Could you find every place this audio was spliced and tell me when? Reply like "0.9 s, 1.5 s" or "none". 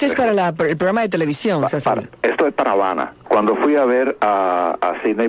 3.2 s